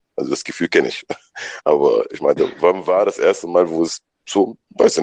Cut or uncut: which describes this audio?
uncut